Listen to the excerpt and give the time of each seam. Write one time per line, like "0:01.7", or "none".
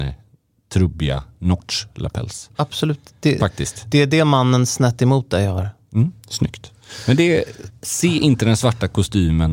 0:03.4
0:07.7